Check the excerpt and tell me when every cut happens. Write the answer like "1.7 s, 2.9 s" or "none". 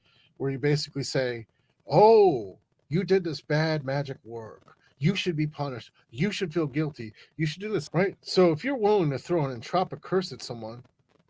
7.9 s